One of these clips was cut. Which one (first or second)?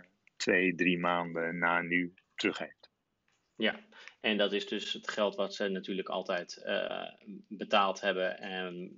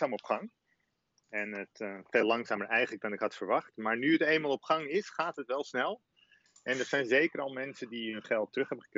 first